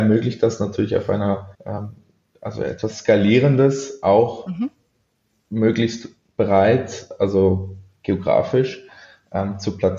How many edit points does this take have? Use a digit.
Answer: 1